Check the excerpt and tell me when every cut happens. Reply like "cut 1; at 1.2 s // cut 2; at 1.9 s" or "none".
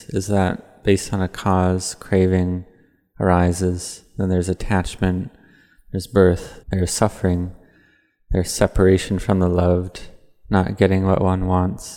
cut 1; at 6.6 s